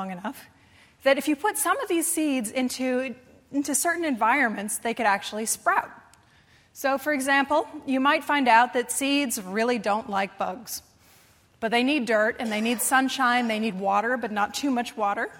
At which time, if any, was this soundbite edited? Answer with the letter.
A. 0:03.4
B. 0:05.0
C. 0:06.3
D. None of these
D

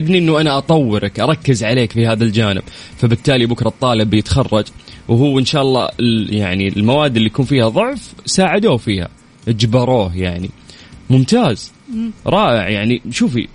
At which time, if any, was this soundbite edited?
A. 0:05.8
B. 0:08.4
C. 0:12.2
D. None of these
C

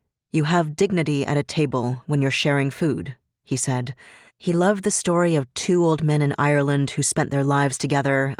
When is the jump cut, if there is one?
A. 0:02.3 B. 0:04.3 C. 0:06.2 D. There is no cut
B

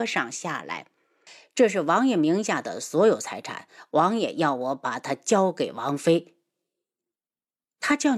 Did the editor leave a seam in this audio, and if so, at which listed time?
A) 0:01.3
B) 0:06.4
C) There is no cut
A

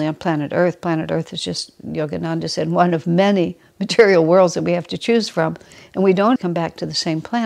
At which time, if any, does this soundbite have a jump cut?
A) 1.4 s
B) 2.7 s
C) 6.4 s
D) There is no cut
C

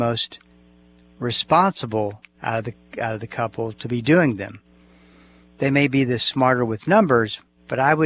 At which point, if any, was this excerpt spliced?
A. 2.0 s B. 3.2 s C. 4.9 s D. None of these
D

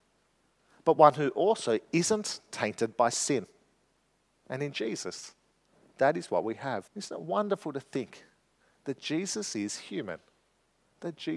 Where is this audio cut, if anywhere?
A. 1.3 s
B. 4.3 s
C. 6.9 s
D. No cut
C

